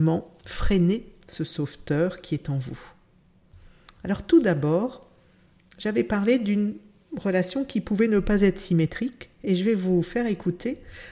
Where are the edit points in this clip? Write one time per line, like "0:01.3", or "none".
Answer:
none